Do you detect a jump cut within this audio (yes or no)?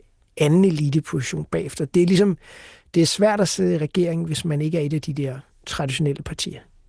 no